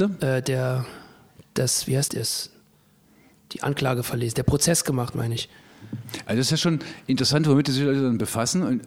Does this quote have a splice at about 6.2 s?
no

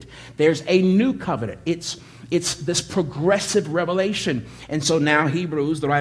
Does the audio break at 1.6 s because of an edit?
no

